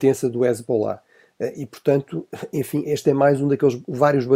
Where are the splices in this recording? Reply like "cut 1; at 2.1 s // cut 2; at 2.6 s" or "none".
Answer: none